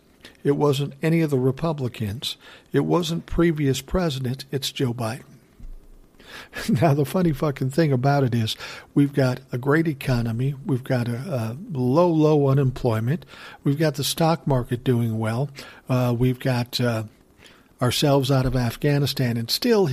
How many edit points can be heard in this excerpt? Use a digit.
0